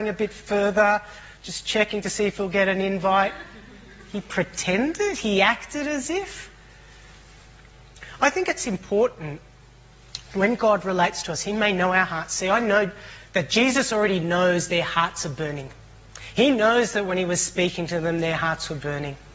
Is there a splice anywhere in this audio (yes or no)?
no